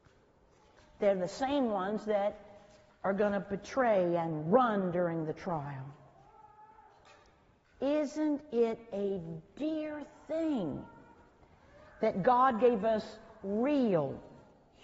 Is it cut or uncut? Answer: uncut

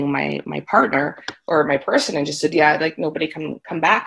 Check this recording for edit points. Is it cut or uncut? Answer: cut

